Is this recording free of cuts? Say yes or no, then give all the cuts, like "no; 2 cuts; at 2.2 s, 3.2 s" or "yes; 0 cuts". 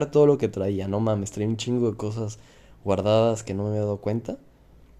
yes; 0 cuts